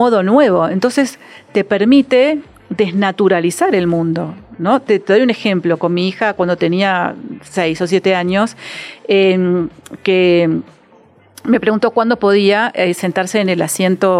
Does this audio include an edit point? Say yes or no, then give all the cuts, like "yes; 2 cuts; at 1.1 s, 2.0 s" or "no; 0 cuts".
no; 0 cuts